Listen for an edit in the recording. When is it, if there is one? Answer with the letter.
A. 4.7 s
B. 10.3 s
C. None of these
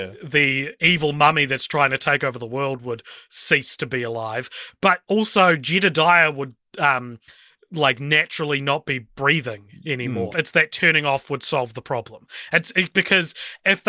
B